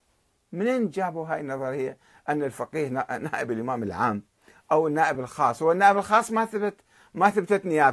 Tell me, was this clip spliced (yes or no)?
no